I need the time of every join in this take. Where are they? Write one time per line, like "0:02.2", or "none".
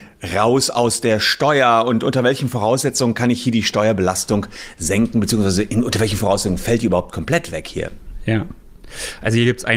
none